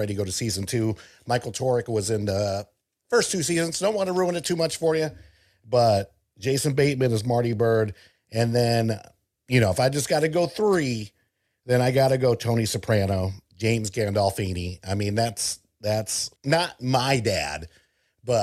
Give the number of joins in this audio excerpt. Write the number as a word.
one